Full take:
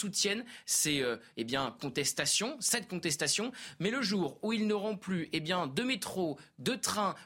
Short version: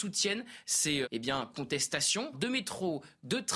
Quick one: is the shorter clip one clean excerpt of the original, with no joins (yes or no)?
no